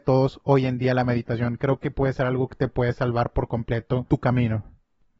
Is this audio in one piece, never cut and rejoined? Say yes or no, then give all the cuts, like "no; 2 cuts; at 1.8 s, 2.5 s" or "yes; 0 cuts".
yes; 0 cuts